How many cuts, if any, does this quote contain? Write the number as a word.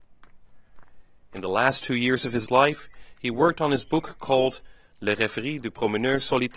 zero